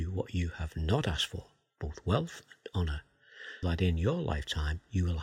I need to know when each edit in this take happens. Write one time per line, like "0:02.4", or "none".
0:03.6

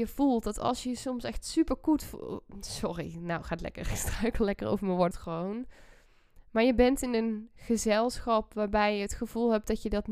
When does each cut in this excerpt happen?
0:05.1

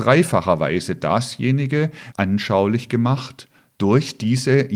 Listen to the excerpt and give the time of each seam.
0:02.1

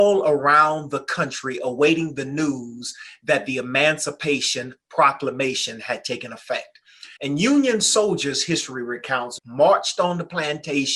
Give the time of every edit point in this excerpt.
0:07.2
0:09.4

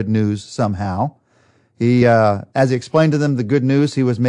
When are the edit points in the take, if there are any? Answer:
none

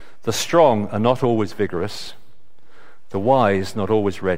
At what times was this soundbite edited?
none

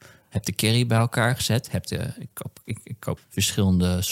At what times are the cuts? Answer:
0:03.2

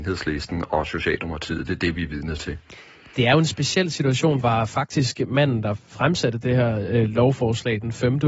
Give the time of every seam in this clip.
0:04.4

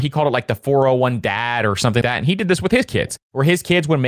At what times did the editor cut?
0:02.0

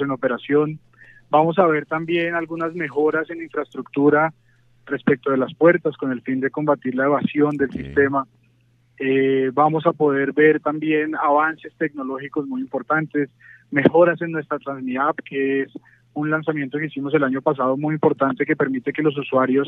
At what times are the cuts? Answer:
none

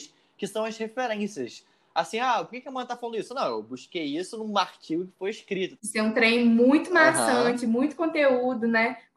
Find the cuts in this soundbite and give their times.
0:05.8

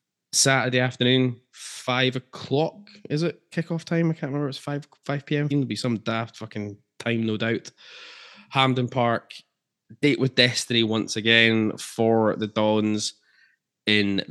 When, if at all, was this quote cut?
0:05.5

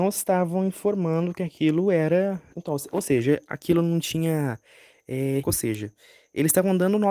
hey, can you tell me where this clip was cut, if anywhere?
0:02.5
0:05.4

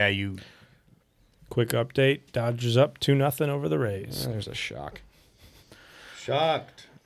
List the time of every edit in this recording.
0:01.4

